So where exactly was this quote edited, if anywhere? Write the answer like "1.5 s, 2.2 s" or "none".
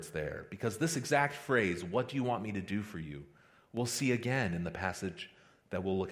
none